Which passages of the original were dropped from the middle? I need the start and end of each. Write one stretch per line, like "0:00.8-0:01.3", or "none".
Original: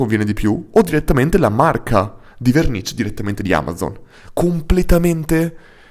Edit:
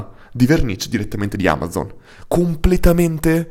none